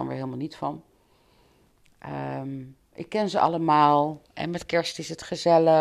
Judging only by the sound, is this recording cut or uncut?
uncut